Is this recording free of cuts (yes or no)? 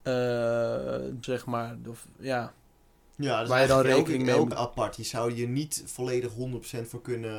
no